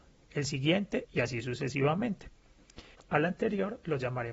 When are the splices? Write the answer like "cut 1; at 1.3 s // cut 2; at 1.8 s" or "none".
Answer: cut 1; at 1.1 s // cut 2; at 3.0 s